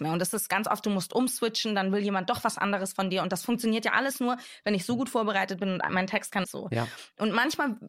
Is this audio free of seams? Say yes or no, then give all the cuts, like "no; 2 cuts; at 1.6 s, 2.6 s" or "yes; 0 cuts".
no; 1 cut; at 6.4 s